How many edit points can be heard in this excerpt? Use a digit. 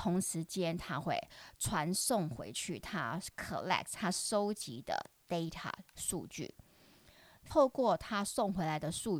1